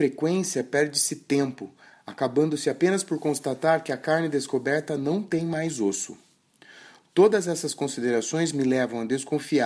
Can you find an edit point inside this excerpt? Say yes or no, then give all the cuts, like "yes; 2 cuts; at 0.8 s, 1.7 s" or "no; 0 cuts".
no; 0 cuts